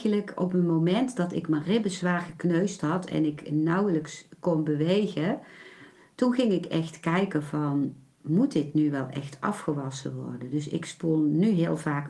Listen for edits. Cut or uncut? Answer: uncut